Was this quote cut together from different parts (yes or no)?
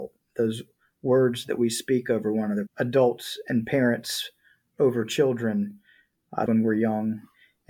yes